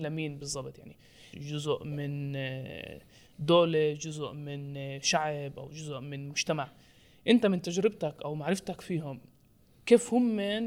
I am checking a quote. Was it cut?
yes; 1 cut; at 1.3 s

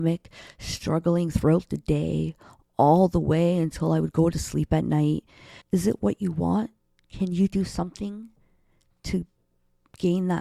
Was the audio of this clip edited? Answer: yes; 1 cut; at 5.6 s

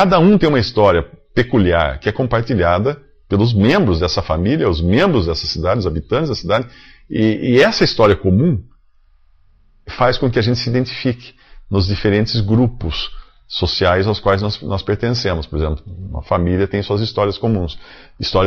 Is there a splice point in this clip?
no; 0 cuts

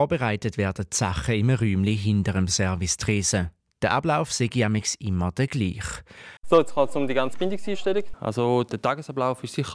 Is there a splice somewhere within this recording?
yes; 2 cuts; at 6.4 s, 8.1 s

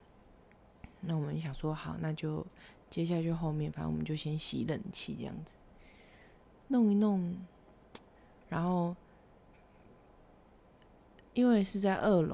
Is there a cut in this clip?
yes; 1 cut; at 8.4 s

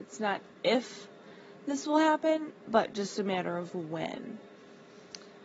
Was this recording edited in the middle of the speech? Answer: no; 0 cuts

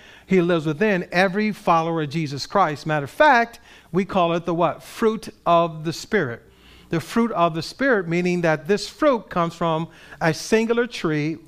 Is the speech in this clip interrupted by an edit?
no; 0 cuts

